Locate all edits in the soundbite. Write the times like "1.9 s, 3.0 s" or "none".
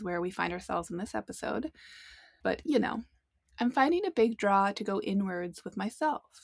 2.4 s